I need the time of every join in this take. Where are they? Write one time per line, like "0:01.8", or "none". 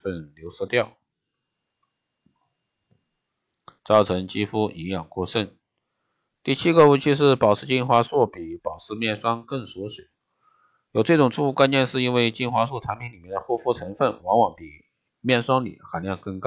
0:03.8

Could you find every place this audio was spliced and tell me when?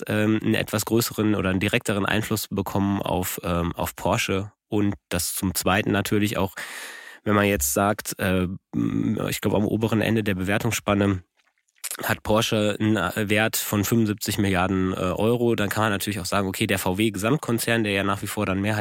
none

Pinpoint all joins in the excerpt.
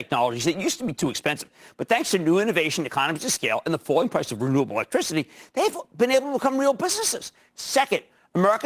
none

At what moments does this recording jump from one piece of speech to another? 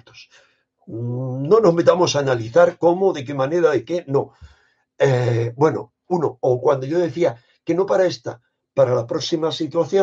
none

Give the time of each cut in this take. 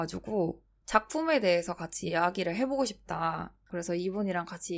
0:03.7

